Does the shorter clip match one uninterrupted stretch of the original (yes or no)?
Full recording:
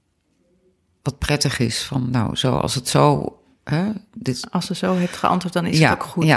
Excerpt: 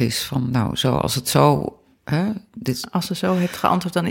yes